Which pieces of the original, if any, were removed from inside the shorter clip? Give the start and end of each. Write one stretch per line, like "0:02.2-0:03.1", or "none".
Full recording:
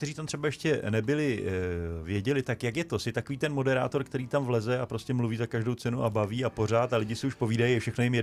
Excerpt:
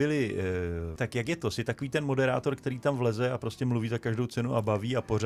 0:02.0-0:02.4